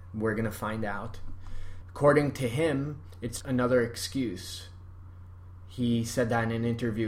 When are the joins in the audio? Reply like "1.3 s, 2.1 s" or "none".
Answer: 1.8 s, 3.4 s